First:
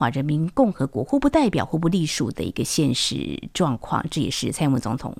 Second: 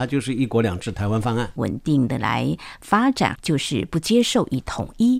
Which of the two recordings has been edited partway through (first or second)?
second